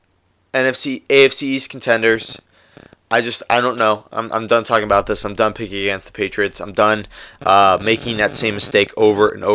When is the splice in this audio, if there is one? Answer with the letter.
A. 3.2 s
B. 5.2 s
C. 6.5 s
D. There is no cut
D